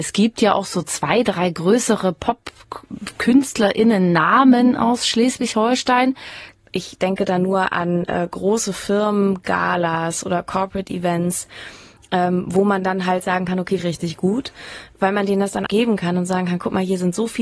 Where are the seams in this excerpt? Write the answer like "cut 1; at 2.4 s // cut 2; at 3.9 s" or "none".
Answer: cut 1; at 6.5 s // cut 2; at 13.8 s // cut 3; at 15.7 s